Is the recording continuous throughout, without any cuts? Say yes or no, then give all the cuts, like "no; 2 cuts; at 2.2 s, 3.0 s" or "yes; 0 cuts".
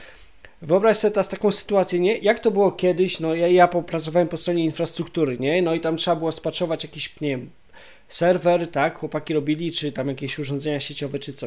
yes; 0 cuts